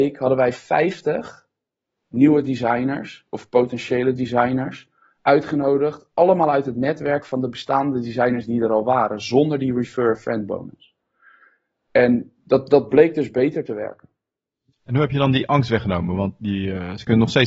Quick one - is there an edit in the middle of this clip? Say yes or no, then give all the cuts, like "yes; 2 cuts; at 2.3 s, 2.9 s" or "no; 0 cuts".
no; 0 cuts